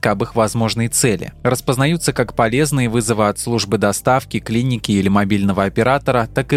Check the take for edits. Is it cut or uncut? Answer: uncut